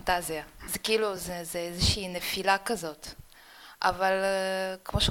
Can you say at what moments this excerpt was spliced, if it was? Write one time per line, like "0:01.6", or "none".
none